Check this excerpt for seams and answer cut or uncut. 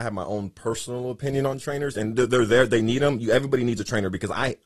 uncut